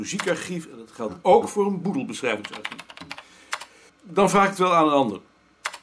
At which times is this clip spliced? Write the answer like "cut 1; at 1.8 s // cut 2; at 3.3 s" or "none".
cut 1; at 3.9 s

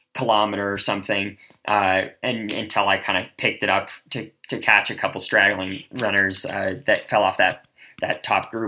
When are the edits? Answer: none

